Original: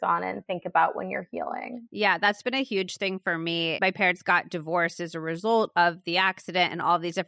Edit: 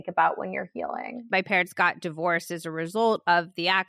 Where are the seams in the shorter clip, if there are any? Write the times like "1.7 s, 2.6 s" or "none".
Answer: 1.3 s

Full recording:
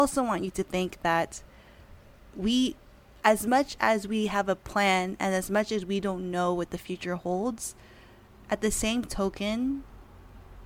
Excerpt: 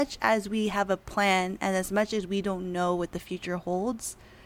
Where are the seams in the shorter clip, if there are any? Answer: none

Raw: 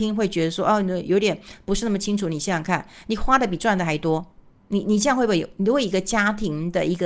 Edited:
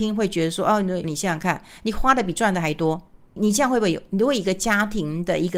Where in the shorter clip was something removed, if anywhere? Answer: 1.0 s, 3.4 s

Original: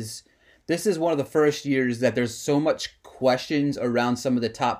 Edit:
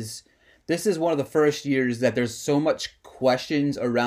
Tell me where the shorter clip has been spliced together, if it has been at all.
none

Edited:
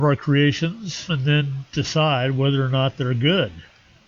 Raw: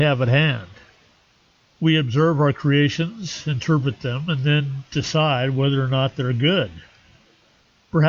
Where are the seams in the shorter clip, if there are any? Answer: 1.1 s

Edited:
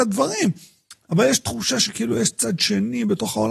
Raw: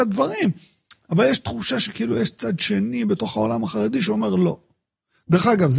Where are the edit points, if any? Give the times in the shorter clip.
none

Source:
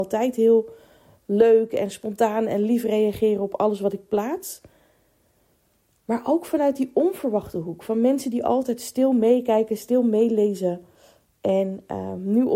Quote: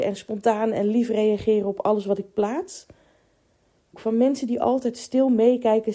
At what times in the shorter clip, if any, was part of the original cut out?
3.9 s

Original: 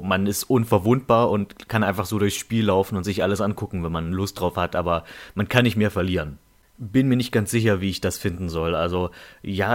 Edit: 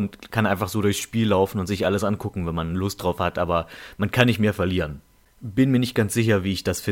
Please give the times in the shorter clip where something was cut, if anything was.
none

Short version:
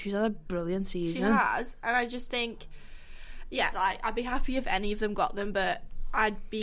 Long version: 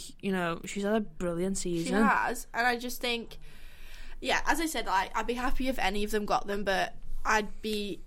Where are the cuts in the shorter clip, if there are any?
3.7 s

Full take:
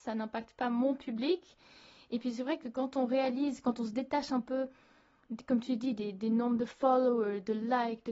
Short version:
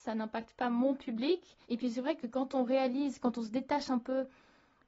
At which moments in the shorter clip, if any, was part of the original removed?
1.6 s

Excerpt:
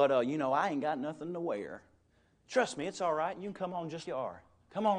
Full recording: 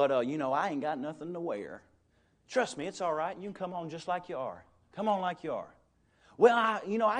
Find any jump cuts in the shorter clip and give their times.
4.0 s

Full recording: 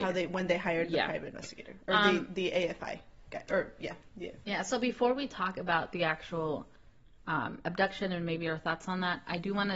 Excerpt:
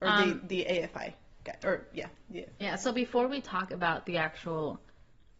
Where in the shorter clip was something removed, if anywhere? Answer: none

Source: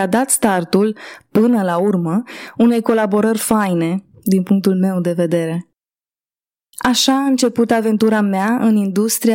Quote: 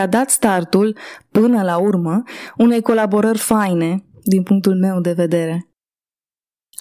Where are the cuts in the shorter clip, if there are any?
none

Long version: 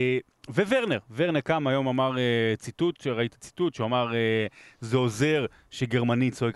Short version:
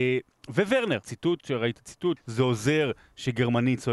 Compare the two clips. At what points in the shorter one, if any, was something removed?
1.0 s, 2.2 s

